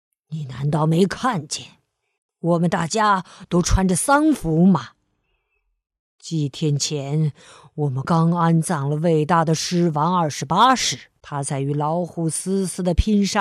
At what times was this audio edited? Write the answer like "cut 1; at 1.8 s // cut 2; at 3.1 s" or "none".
cut 1; at 8.0 s // cut 2; at 11.2 s

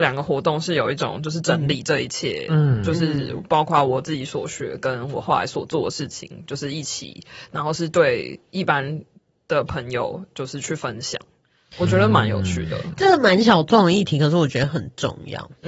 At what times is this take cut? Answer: none

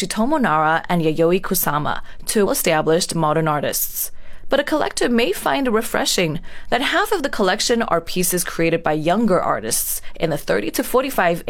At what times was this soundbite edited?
cut 1; at 2.5 s

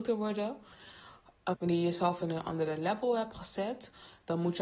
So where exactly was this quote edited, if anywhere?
cut 1; at 1.5 s

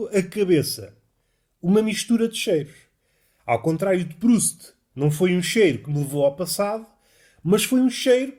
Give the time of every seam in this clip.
none

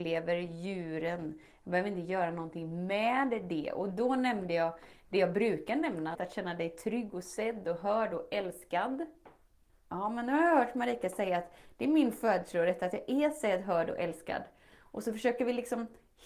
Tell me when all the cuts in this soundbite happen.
cut 1; at 6.1 s // cut 2; at 9.7 s

